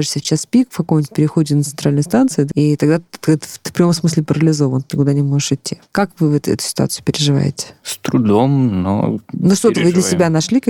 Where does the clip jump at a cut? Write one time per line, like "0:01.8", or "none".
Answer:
0:02.5